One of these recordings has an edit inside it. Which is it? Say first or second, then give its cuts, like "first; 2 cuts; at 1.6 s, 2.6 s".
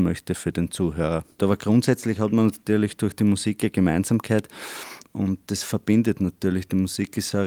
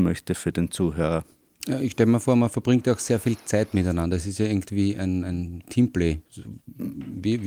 first; 2 cuts; at 1.4 s, 5.0 s